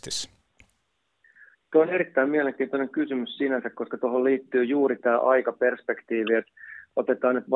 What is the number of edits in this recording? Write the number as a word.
zero